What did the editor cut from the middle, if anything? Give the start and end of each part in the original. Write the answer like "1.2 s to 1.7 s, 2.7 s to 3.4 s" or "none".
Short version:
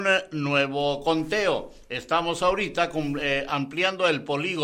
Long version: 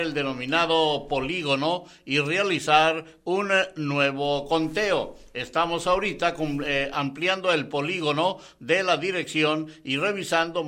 none